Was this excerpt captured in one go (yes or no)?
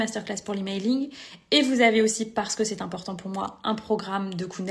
yes